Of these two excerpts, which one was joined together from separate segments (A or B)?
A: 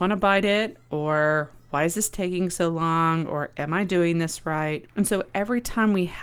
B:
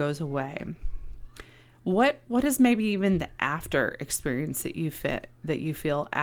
A